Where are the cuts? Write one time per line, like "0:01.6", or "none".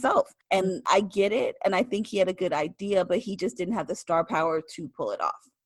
none